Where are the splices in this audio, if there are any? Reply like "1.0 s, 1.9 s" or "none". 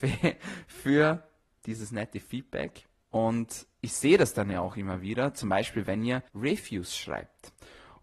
3.0 s, 6.3 s